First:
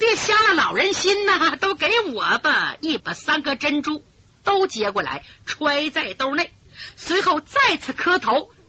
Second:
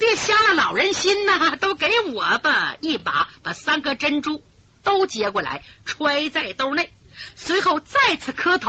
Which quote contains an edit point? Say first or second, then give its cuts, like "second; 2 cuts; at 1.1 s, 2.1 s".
first; 1 cut; at 3.0 s